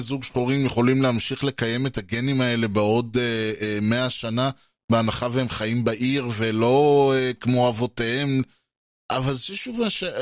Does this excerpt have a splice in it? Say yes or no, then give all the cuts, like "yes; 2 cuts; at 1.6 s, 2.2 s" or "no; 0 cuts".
no; 0 cuts